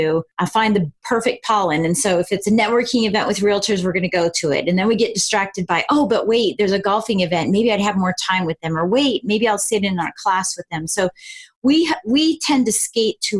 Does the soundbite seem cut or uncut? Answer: uncut